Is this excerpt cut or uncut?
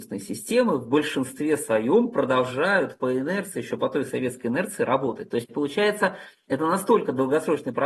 uncut